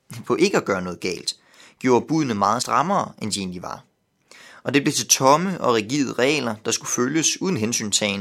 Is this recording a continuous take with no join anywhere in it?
yes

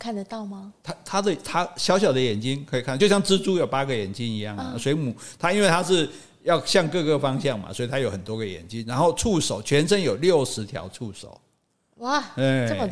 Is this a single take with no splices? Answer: yes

